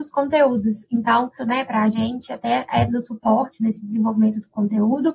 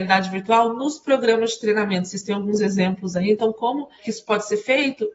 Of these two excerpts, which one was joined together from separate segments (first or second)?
first